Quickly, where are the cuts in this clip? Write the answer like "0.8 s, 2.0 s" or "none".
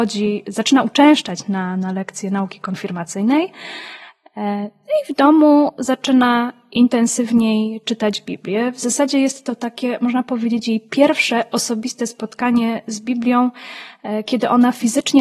none